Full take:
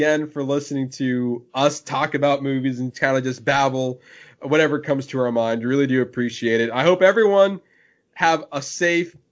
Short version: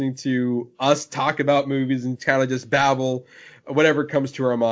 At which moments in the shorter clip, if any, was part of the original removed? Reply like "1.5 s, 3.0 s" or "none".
none